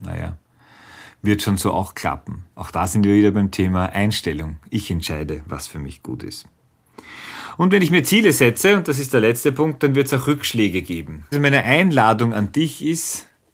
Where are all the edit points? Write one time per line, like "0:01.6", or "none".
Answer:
0:02.5
0:11.3